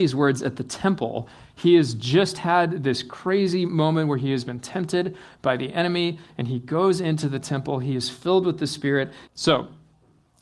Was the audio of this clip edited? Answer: yes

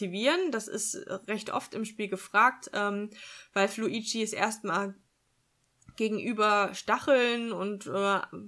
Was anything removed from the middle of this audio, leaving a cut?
no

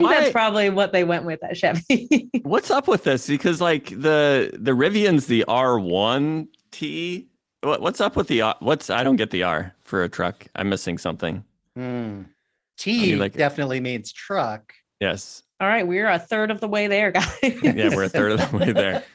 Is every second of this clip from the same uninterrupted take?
yes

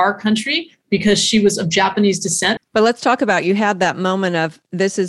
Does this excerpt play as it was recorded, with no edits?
no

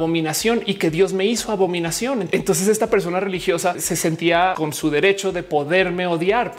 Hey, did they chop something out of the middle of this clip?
no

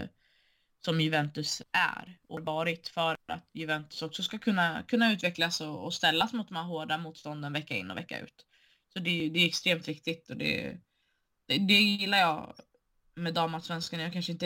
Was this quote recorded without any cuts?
yes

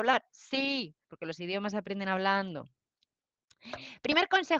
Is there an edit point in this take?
yes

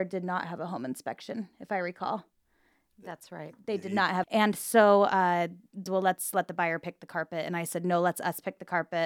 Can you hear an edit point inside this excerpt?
yes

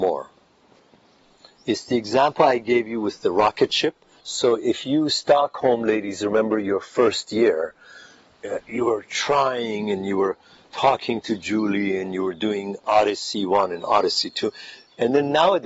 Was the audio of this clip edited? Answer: yes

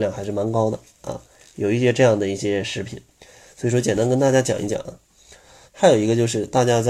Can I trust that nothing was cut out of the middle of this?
no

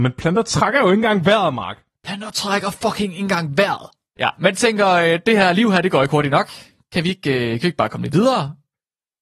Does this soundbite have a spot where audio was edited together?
yes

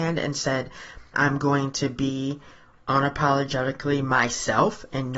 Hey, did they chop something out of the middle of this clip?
yes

